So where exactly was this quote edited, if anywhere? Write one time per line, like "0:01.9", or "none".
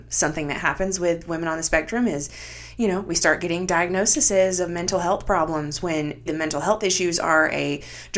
0:06.3